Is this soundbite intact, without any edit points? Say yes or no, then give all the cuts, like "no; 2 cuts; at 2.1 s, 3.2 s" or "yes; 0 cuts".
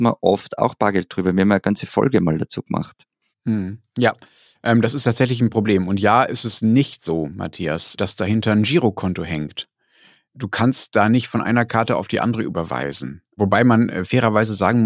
yes; 0 cuts